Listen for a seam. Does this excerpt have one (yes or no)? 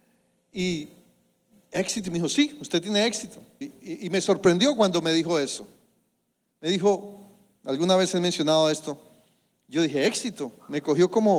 yes